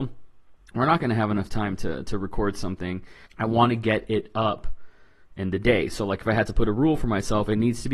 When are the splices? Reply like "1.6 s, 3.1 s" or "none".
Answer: 3.3 s